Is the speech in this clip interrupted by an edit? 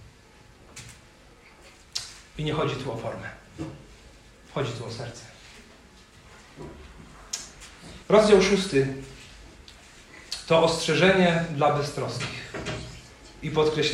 yes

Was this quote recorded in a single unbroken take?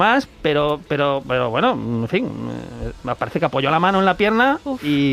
yes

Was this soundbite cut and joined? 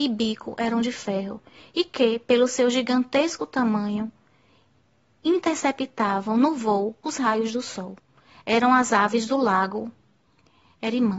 no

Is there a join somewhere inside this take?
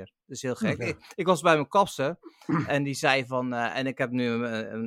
no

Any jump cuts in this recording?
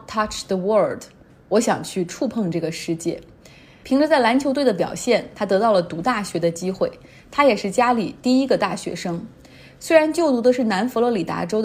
no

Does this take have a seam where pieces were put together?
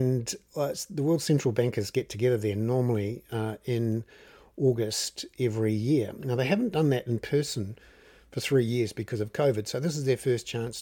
no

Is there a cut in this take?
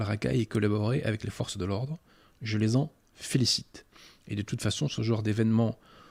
no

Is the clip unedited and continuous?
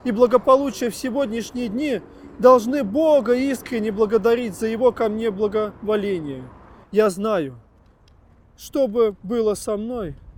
no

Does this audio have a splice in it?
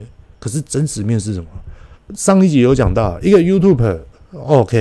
yes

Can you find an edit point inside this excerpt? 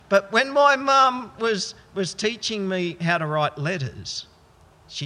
no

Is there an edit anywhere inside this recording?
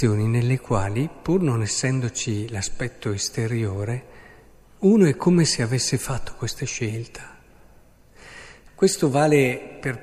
yes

